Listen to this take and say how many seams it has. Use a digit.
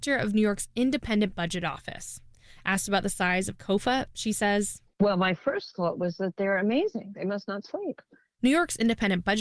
0